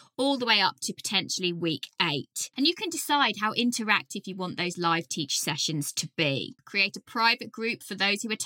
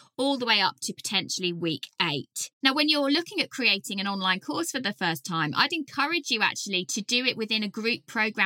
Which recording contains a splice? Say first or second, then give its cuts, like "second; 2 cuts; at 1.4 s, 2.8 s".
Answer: first; 2 cuts; at 2.5 s, 6.6 s